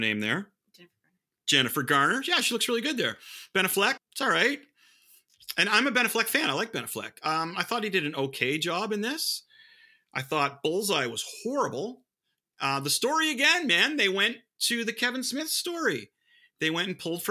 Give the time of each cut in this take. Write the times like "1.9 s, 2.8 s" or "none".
4.0 s